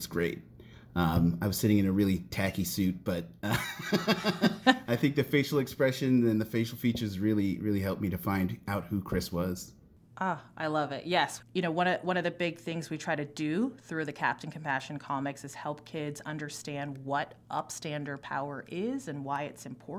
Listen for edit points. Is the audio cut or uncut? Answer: cut